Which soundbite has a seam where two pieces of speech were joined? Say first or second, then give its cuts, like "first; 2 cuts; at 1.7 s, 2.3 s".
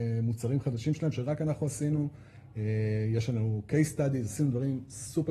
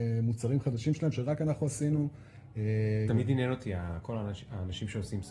second; 1 cut; at 3.1 s